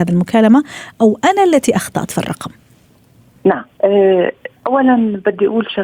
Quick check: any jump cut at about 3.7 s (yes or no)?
yes